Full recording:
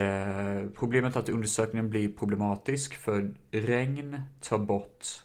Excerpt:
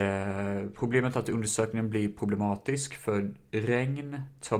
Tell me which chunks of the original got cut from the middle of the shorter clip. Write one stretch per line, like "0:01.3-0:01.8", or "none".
none